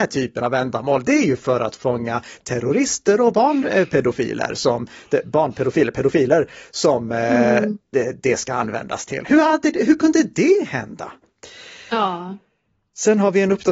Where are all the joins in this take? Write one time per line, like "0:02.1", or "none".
none